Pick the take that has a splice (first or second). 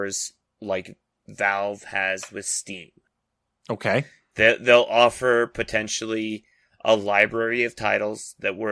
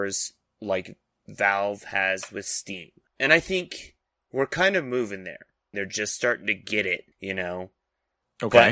second